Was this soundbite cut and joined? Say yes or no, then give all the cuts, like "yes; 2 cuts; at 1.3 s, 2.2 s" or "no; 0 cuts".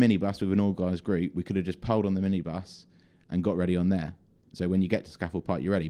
no; 0 cuts